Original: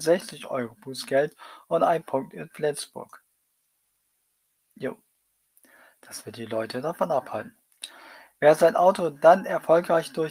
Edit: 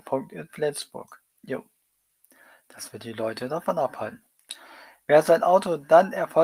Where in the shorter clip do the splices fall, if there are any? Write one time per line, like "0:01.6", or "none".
0:01.3